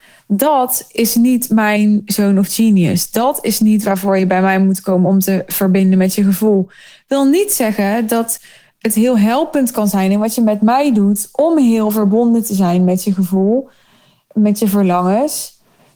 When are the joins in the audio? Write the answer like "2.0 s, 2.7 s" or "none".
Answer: 14.3 s